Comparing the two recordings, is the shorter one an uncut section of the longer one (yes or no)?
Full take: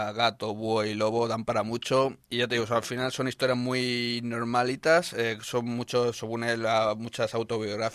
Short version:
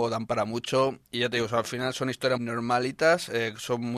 no